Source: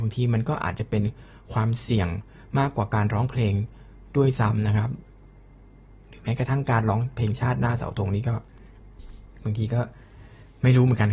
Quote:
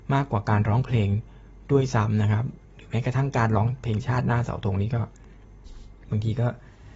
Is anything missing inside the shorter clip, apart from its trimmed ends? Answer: yes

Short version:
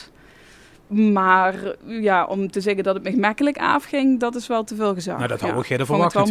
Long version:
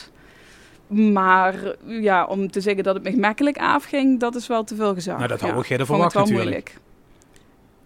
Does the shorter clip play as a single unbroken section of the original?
yes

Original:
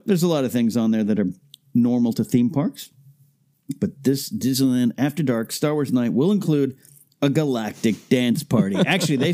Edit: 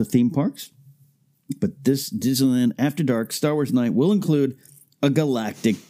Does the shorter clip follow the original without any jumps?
yes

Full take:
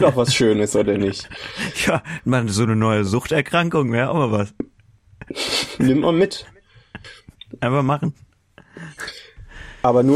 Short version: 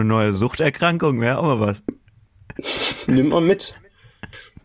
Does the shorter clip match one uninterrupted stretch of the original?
yes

